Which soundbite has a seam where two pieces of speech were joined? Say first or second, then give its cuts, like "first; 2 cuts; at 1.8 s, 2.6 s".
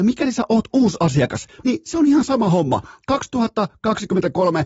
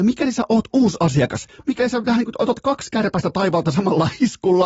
first; 1 cut; at 1.6 s